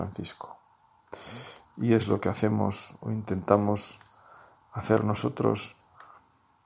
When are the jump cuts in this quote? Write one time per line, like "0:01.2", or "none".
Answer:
none